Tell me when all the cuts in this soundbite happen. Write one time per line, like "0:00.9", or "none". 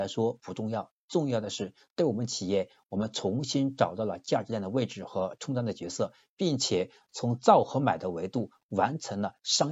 none